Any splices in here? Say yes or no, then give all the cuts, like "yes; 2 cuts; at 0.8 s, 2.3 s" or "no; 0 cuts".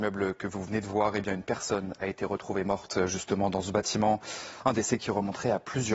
no; 0 cuts